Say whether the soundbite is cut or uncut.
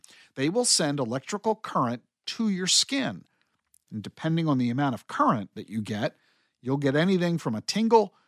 uncut